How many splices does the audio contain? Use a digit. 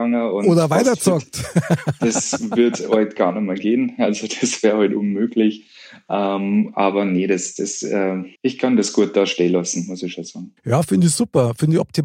1